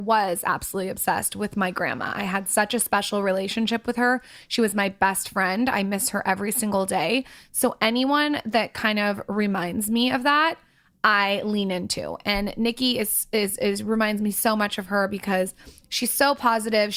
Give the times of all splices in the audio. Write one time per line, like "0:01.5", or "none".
none